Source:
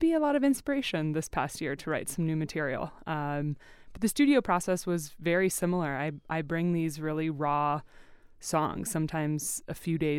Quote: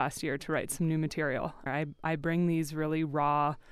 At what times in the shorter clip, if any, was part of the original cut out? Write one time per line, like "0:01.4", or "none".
0:01.7